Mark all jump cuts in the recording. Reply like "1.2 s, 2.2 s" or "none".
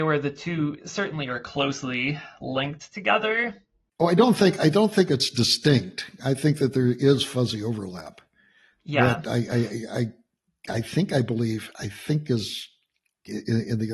none